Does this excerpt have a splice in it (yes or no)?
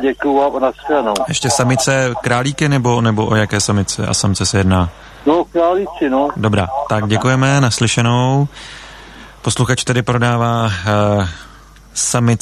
no